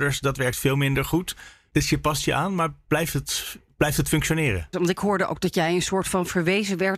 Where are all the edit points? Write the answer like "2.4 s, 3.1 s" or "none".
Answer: 4.7 s